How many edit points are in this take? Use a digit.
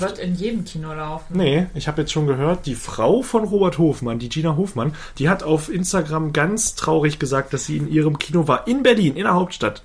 0